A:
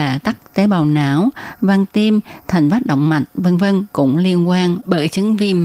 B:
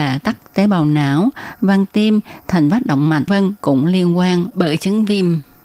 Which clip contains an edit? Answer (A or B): B